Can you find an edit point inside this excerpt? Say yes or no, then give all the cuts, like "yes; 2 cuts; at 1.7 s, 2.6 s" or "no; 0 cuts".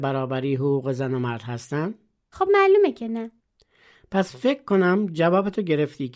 no; 0 cuts